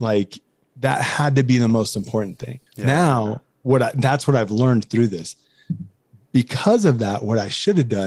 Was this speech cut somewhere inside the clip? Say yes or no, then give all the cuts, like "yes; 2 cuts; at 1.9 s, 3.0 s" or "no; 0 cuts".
yes; 1 cut; at 2.7 s